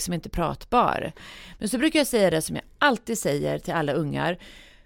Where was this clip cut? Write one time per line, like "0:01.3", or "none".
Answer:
none